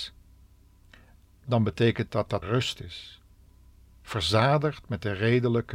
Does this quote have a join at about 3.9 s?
no; 1 cut; at 2.4 s

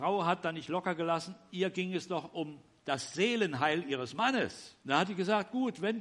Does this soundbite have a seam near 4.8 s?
yes; 1 cut; at 4.8 s

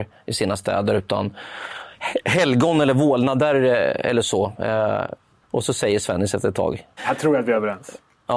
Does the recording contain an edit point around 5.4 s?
yes; 2 cuts; at 5.4 s, 7.0 s

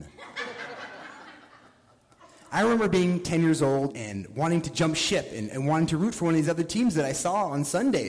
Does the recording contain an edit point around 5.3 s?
no; 1 cut; at 3.9 s

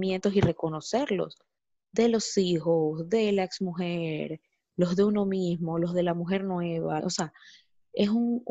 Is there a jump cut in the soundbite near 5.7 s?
no; 1 cut; at 7.0 s

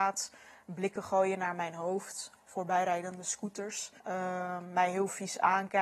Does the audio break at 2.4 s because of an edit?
no; 1 cut; at 4.0 s

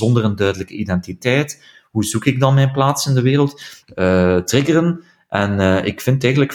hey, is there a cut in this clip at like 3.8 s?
yes; 1 cut; at 3.8 s

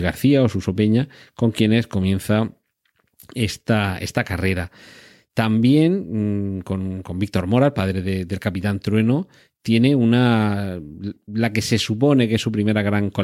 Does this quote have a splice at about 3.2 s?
no; 0 cuts

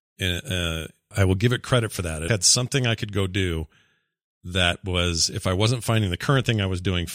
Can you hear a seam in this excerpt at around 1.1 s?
yes; 2 cuts; at 1.1 s, 2.3 s

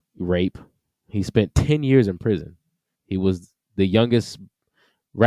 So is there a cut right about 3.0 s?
yes; 1 cut; at 3.0 s

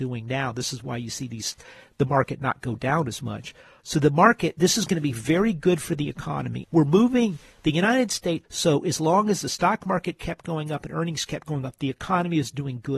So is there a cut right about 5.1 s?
no; 3 cuts; at 3.8 s, 6.6 s, 8.4 s

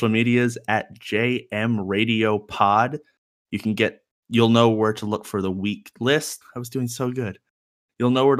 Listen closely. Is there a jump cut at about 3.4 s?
no; 1 cut; at 6.4 s

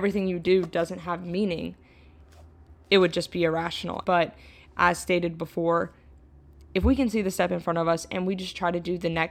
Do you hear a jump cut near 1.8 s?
no; 1 cut; at 4.0 s

